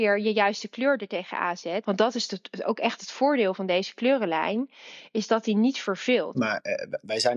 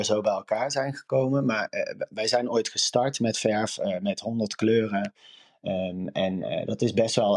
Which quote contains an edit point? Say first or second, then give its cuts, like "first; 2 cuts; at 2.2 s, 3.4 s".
first; 2 cuts; at 1.8 s, 6.3 s